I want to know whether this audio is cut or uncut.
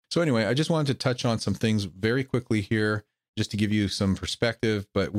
uncut